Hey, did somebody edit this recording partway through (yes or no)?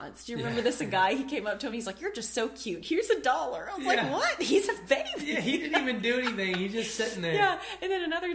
no